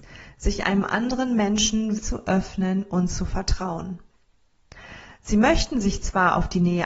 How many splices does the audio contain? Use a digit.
1